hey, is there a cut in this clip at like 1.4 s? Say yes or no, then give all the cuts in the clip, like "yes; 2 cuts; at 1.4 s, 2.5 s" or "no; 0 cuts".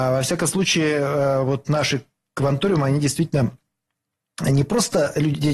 no; 0 cuts